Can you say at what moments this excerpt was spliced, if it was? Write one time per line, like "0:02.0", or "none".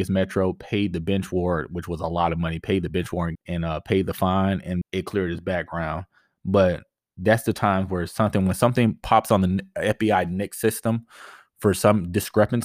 0:03.3
0:04.8